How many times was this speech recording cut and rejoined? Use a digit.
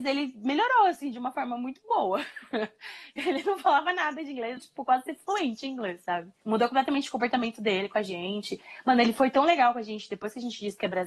1